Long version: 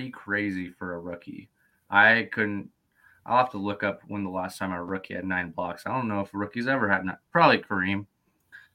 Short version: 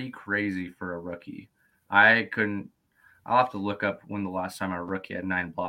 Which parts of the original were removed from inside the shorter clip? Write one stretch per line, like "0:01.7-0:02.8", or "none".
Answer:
none